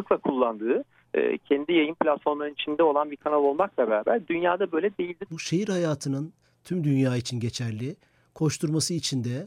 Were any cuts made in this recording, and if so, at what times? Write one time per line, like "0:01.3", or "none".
0:05.3